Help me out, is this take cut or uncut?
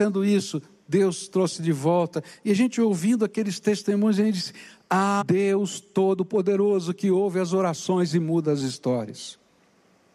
cut